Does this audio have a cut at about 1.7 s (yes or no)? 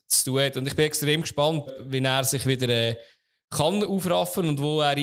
yes